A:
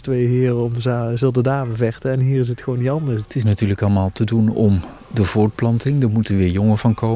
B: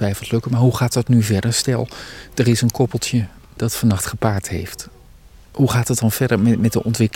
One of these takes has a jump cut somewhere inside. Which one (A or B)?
A